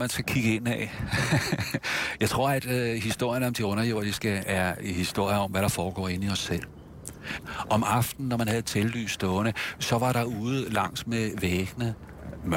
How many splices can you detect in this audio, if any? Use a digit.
0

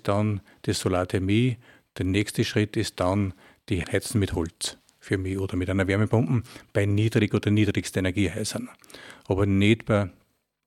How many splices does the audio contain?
1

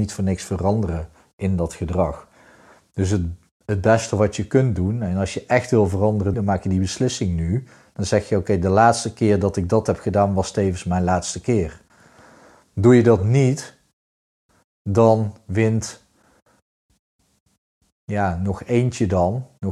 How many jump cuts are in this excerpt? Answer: 1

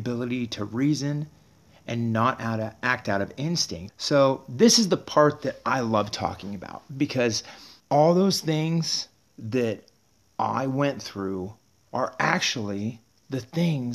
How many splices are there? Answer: 2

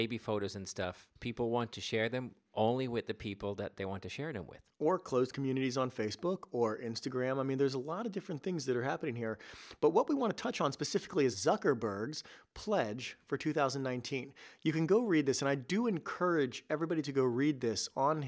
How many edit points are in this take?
1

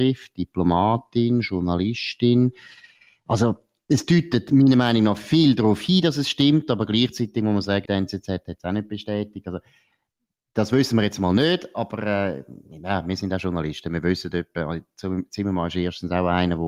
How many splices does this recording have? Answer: 1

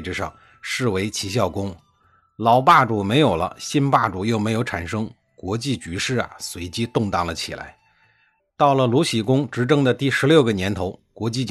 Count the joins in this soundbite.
1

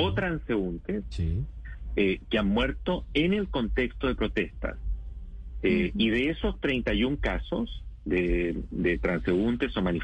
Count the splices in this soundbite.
0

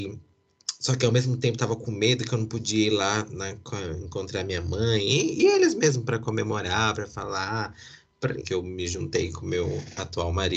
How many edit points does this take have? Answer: 1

